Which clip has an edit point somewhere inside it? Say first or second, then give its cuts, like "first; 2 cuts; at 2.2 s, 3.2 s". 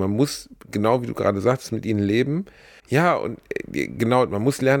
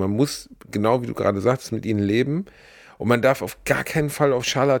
first; 1 cut; at 2.8 s